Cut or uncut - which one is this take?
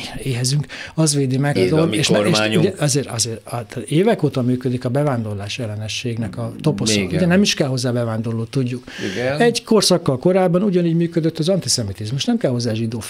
cut